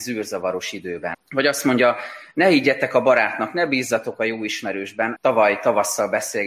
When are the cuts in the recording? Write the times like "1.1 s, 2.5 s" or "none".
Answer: 1.1 s, 5.2 s